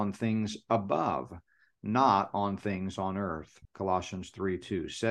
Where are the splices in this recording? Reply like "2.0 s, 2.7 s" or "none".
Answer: 3.7 s